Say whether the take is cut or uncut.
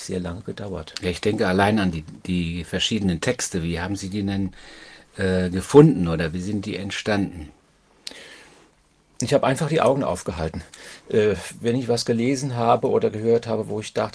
uncut